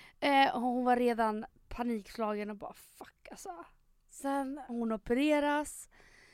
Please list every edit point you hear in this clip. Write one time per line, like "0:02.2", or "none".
0:04.7

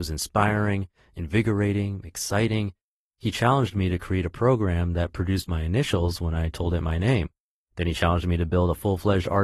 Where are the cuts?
none

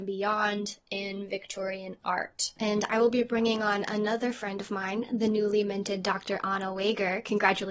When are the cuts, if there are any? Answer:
none

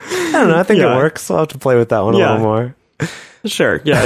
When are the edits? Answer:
none

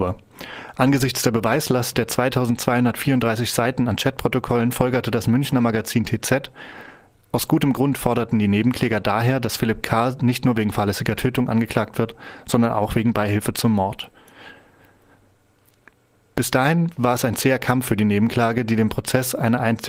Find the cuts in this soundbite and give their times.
none

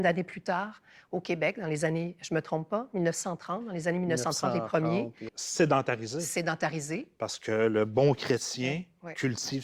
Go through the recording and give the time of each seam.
0:05.3

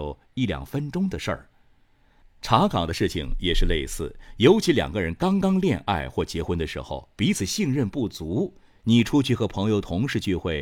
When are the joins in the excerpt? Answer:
0:02.2

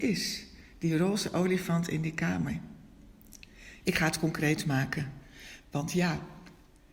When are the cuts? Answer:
0:03.8
0:05.6

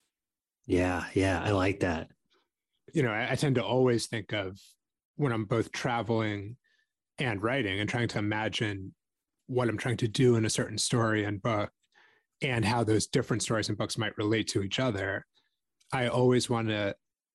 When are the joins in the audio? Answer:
0:08.1

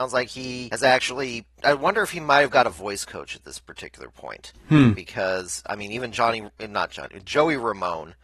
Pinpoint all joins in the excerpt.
0:04.9

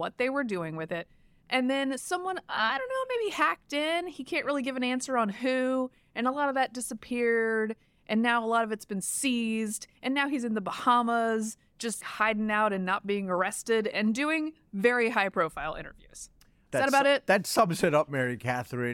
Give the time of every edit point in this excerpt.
0:12.0
0:16.7

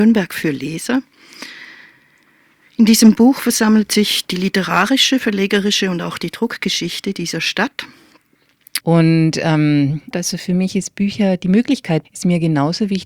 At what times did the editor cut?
0:08.8
0:10.1
0:12.0

